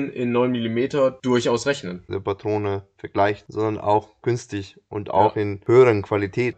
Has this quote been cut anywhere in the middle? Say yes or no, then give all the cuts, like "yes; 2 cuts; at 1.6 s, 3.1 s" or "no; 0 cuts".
yes; 2 cuts; at 2.1 s, 3.5 s